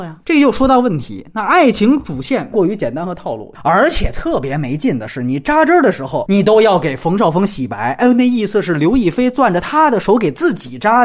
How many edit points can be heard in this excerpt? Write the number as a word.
one